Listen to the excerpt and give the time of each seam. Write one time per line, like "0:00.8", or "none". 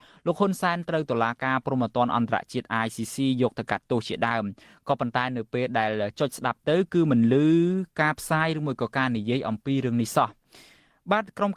none